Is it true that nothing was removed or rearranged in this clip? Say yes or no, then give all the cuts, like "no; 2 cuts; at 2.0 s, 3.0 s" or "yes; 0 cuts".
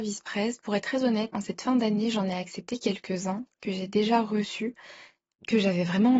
no; 1 cut; at 1.3 s